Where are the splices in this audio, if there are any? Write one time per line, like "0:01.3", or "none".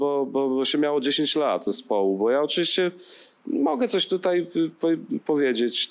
0:01.7